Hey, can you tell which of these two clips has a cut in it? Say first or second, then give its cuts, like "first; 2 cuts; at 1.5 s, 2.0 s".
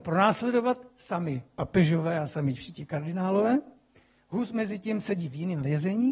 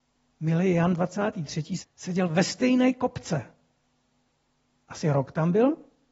second; 1 cut; at 1.8 s